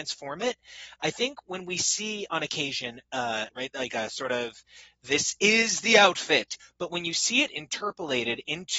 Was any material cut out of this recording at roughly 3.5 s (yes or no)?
yes